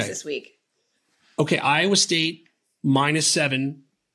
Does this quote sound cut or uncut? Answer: uncut